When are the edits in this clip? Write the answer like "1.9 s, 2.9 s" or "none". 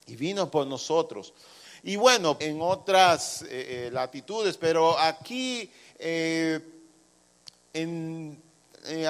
2.4 s